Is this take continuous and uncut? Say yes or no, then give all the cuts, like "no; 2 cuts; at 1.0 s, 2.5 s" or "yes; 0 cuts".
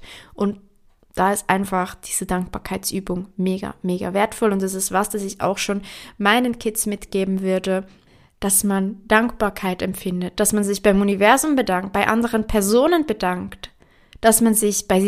no; 1 cut; at 10.3 s